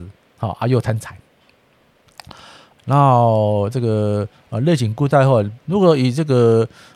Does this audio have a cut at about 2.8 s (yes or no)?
yes